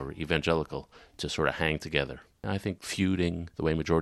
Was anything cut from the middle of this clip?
no; 0 cuts

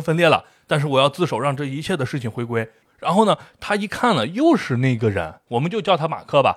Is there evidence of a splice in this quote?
yes; 1 cut; at 2.9 s

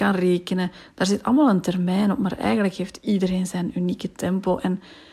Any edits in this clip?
no; 0 cuts

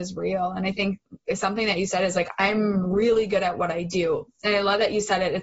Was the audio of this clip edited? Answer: no; 0 cuts

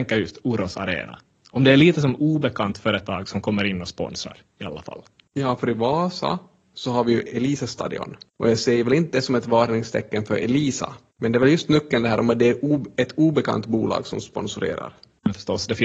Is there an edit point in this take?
no; 0 cuts

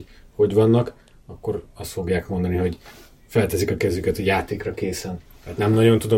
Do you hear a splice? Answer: no; 0 cuts

